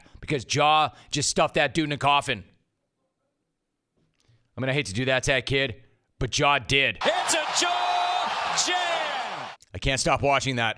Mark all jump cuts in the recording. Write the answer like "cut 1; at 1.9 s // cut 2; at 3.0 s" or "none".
cut 1; at 7.0 s